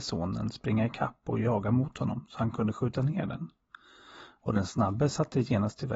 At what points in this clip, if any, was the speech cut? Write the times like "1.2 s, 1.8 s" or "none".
none